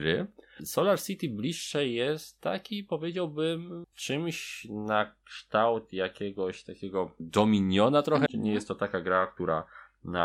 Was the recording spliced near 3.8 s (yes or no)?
yes